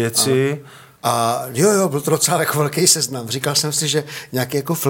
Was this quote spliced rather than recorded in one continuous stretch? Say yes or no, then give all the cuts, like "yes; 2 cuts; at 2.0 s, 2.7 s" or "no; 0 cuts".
yes; 1 cut; at 1.0 s